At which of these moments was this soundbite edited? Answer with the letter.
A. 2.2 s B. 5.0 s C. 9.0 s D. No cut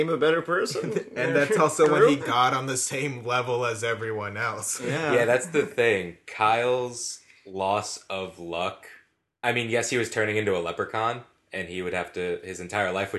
A